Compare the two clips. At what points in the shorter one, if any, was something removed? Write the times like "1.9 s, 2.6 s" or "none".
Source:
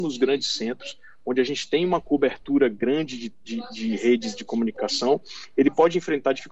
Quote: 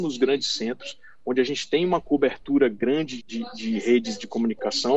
3.2 s